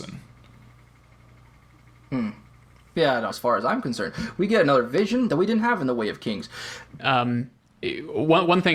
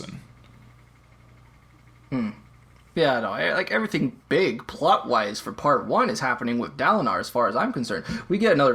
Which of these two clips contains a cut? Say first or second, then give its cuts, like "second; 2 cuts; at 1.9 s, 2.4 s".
first; 3 cuts; at 3.3 s, 5.3 s, 7.0 s